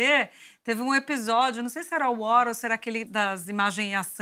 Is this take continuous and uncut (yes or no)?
no